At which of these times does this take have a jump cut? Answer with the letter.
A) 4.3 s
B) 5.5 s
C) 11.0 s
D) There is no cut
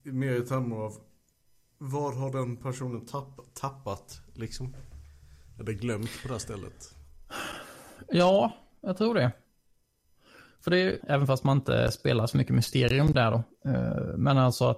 C